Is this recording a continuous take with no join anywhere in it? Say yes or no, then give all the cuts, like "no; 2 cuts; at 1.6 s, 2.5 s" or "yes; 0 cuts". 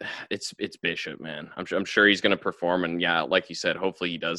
yes; 0 cuts